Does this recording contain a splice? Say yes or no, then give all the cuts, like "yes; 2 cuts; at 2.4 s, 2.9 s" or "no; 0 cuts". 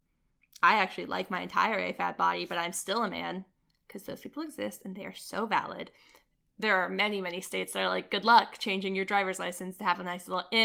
no; 0 cuts